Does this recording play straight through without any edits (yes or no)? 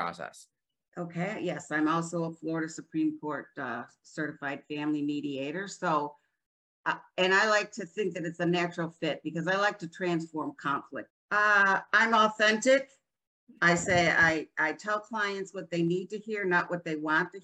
no